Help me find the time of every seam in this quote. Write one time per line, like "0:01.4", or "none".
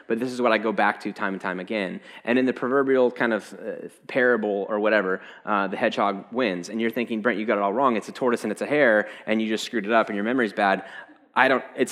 none

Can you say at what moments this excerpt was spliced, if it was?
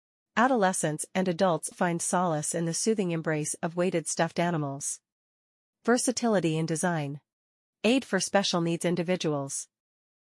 0:01.7
0:05.7
0:07.6

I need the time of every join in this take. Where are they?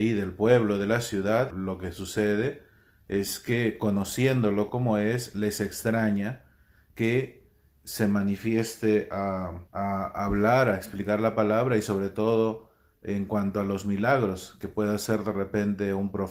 0:01.5
0:09.7

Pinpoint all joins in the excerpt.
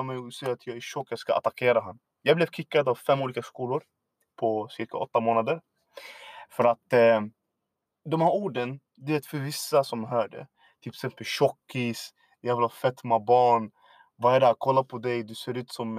none

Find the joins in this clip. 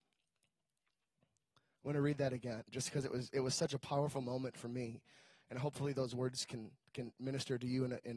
none

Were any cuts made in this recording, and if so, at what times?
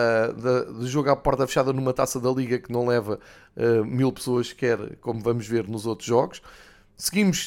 none

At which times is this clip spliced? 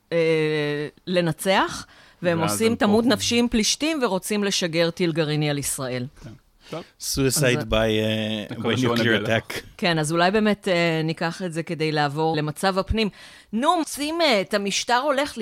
0:12.3
0:13.8

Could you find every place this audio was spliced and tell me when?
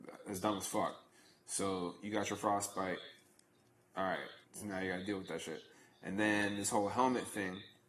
0:04.4

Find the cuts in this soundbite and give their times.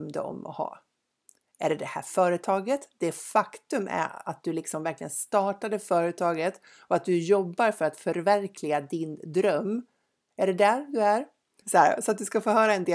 0:11.6

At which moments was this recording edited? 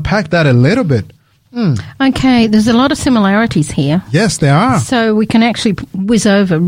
none

